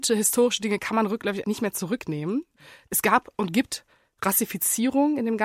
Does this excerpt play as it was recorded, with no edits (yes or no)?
no